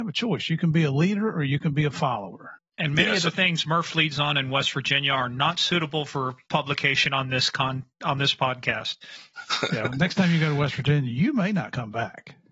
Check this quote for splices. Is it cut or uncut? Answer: cut